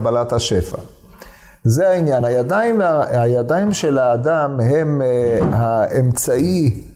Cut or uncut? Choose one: uncut